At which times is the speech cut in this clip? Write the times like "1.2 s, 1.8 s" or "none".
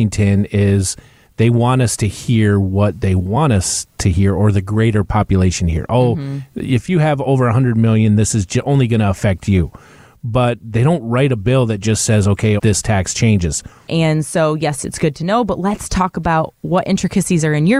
12.6 s, 13.9 s

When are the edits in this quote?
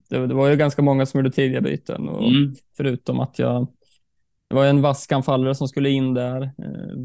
2.7 s

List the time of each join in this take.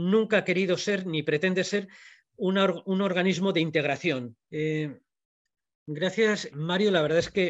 4.5 s, 6.5 s

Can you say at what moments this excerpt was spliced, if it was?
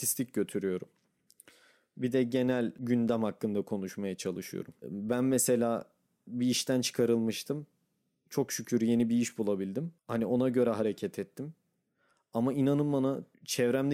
4.8 s

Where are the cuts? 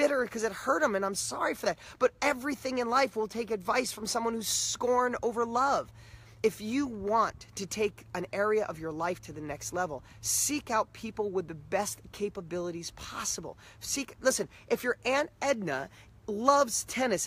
none

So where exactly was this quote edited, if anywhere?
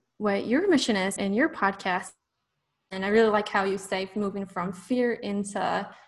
1.2 s

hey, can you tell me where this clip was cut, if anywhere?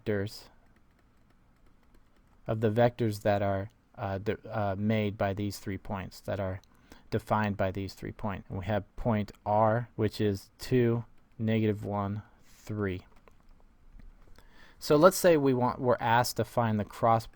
8.4 s, 9.9 s

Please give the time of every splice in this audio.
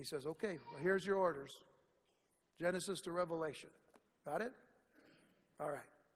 none

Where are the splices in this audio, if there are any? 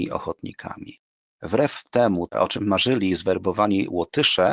none

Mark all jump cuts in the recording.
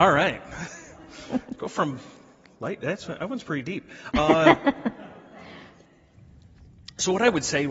none

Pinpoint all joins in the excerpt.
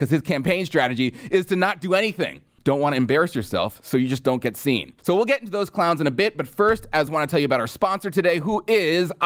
2.6 s, 5.0 s, 7.1 s

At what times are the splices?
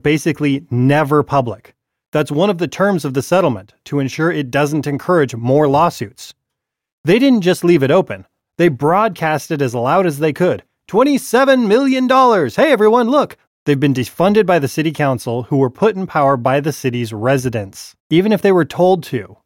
13.5 s, 18.0 s

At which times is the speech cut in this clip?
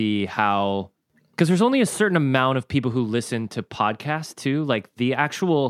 none

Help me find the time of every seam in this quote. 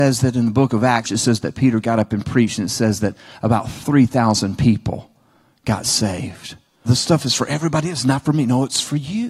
1.0 s, 6.8 s

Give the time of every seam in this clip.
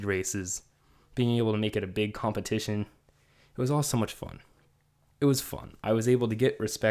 5.1 s

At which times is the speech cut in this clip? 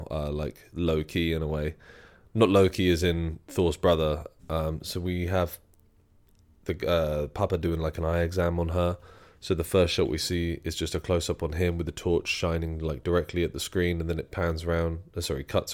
4.4 s

